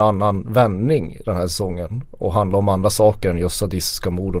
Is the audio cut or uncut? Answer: uncut